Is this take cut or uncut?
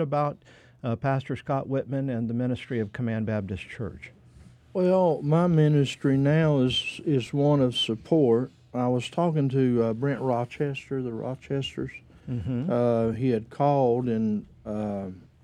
uncut